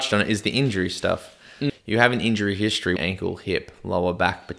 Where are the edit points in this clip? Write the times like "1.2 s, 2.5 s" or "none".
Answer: 1.7 s, 3.0 s